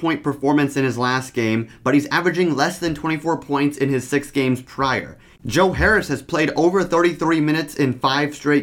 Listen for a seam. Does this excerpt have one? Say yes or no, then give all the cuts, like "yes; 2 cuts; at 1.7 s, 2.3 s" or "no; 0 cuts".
yes; 1 cut; at 5.4 s